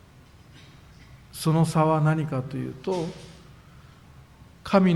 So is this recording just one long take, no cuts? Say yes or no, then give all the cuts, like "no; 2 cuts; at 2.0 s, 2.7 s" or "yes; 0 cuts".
yes; 0 cuts